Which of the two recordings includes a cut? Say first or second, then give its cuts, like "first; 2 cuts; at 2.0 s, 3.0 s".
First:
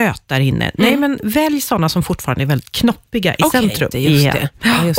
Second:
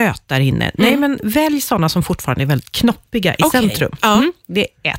first; 1 cut; at 3.9 s